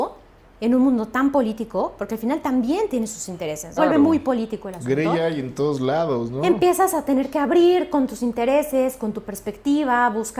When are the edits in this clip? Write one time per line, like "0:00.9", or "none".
0:03.8